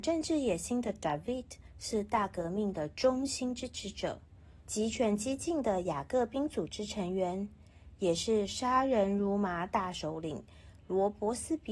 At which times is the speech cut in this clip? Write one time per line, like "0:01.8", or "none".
0:04.7